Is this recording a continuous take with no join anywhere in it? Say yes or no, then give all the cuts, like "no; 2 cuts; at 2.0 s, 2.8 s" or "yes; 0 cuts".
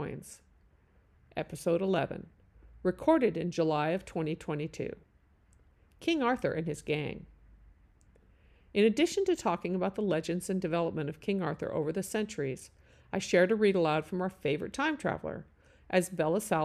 no; 1 cut; at 1.2 s